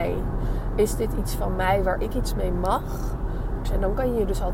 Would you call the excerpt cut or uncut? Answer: cut